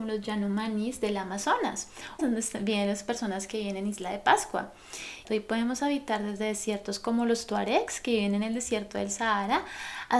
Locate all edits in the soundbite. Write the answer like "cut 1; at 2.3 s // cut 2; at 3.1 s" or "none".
cut 1; at 2.2 s // cut 2; at 5.2 s